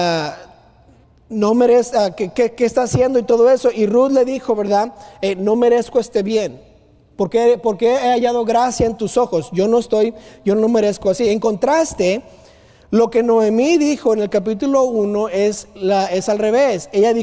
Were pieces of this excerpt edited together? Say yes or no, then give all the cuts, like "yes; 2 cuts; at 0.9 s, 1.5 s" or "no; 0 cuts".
no; 0 cuts